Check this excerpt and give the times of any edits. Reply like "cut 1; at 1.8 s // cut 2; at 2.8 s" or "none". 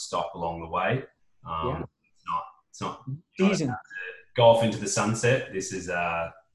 none